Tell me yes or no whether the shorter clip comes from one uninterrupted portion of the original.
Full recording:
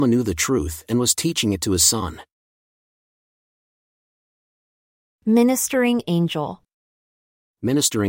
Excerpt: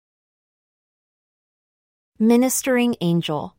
yes